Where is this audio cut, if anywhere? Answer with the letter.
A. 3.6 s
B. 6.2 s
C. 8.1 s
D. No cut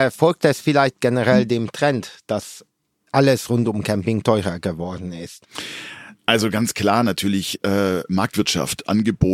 D